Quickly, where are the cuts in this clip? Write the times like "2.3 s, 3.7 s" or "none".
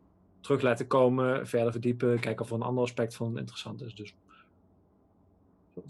none